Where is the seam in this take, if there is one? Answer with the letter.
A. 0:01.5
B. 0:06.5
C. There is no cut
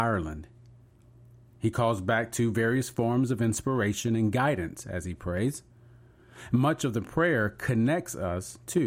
A